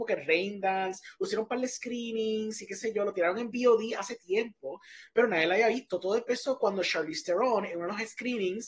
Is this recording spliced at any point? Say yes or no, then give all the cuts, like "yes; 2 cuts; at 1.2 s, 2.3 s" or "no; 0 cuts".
no; 0 cuts